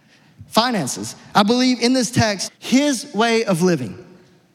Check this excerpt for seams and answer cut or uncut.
cut